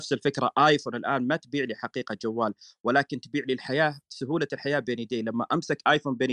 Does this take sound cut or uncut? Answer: uncut